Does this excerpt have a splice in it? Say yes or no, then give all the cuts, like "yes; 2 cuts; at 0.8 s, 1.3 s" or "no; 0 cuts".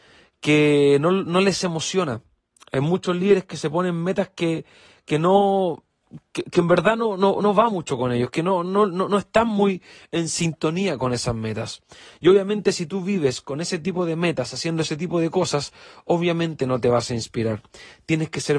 no; 0 cuts